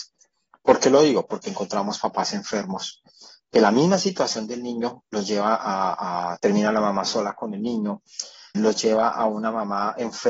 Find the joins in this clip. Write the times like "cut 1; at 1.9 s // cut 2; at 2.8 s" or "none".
cut 1; at 6.4 s // cut 2; at 8.5 s